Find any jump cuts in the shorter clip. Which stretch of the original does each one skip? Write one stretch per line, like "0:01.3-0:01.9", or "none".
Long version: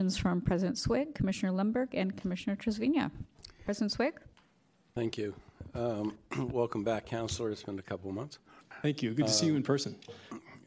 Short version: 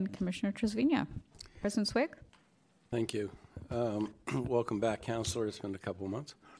none